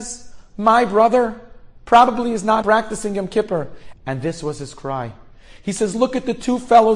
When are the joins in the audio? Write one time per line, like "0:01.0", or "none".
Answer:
0:02.6
0:03.9